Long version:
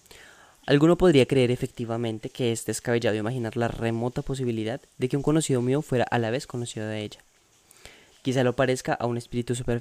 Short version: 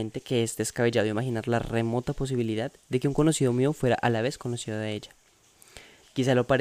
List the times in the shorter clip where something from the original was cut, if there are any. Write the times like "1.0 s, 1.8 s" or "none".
none